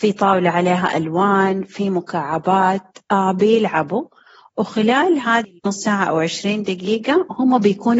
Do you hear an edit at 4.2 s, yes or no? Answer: no